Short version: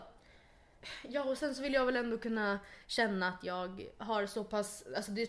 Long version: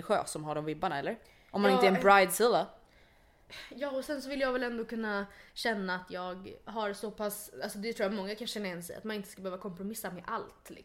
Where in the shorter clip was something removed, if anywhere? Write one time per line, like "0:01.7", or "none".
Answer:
none

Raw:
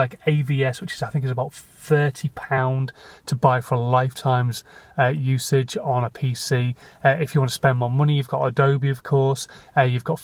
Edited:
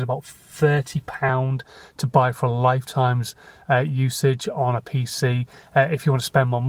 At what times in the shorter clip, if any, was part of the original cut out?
none

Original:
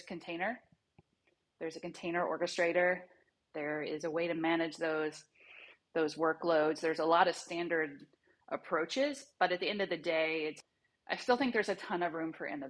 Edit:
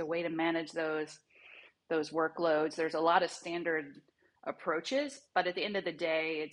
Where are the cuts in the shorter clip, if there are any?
none

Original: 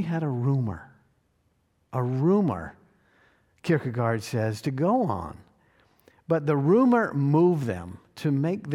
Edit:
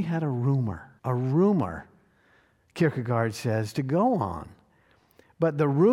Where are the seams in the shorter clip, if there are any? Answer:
0:01.0

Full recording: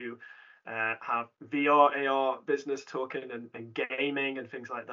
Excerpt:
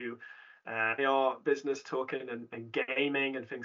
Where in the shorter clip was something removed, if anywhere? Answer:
0:01.0

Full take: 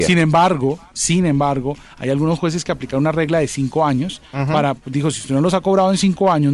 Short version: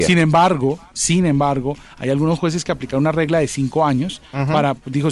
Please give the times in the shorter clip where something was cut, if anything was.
none

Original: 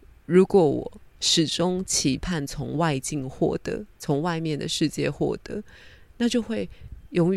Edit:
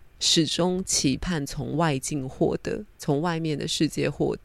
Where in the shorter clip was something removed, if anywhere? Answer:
none

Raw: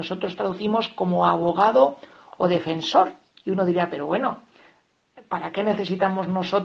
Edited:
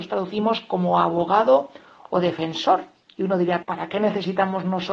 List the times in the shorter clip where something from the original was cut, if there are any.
0:03.6

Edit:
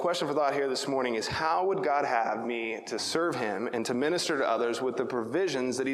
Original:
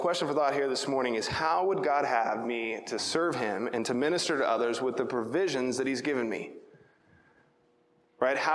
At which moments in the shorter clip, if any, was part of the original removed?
none

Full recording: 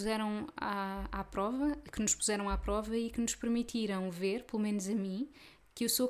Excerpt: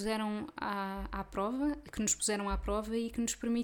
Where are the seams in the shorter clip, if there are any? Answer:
none

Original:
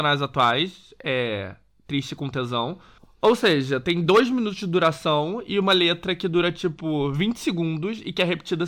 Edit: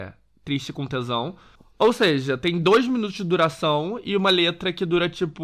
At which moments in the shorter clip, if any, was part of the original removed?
none

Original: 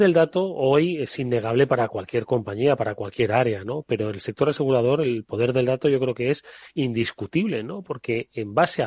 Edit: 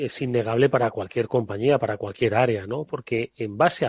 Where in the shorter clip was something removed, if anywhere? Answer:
0:02.9

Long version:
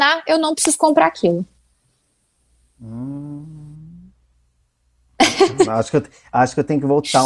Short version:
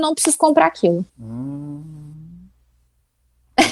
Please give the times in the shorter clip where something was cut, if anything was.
0:01.1

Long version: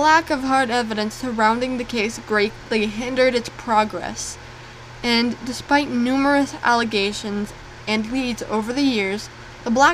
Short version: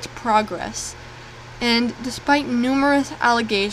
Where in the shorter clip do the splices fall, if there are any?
none

